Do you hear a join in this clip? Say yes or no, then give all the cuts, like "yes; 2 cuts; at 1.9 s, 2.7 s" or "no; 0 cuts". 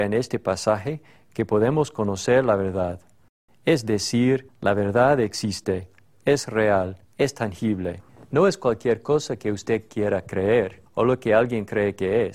no; 0 cuts